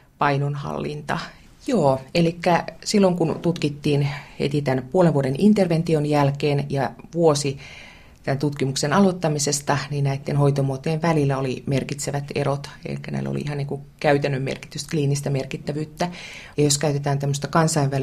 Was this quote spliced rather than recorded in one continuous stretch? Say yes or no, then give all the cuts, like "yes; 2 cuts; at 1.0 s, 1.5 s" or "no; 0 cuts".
yes; 2 cuts; at 1.5 s, 16.5 s